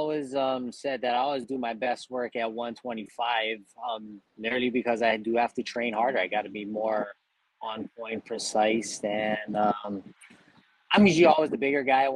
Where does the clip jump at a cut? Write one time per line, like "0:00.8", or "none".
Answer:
0:04.3